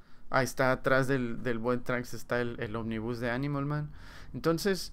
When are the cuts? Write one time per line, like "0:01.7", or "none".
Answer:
none